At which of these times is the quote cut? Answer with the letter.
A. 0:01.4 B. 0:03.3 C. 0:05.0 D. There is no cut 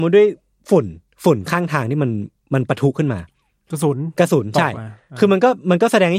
D